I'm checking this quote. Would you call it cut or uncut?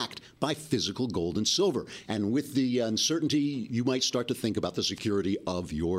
cut